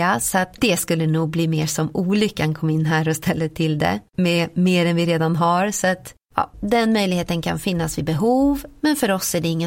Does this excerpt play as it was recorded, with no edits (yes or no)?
no